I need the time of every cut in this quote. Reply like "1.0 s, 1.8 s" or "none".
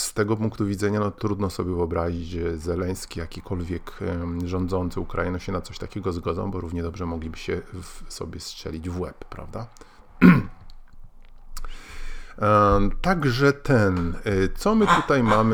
10.0 s